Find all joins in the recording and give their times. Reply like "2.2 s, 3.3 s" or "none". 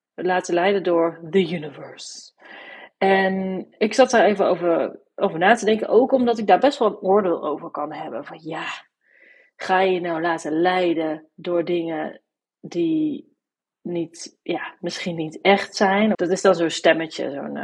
16.1 s

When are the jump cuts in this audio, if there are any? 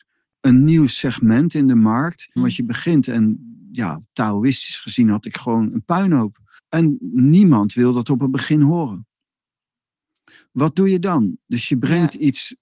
2.4 s, 6.6 s

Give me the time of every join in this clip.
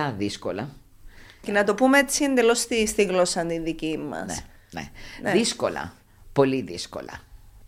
1.4 s

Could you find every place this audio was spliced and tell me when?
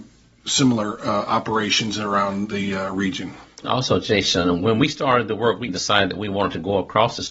3.6 s, 5.7 s

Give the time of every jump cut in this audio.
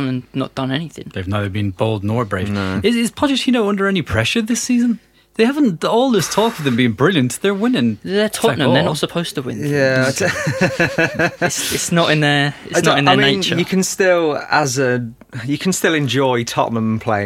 none

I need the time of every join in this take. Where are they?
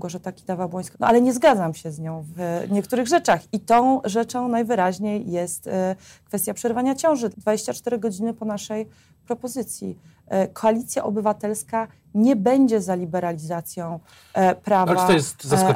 0.9 s, 7.3 s

